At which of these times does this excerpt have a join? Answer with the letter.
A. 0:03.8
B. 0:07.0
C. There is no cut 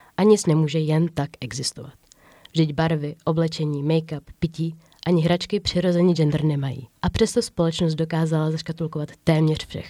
B